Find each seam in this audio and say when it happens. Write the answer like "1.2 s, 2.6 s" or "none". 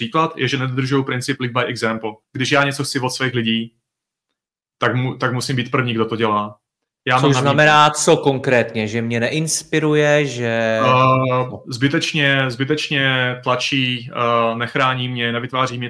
2.2 s, 7.0 s